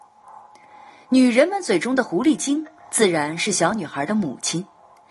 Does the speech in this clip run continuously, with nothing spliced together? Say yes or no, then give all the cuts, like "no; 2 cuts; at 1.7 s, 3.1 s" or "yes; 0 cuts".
yes; 0 cuts